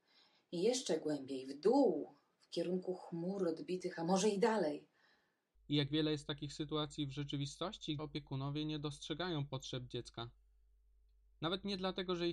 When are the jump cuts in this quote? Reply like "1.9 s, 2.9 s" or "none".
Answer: 5.5 s, 8.0 s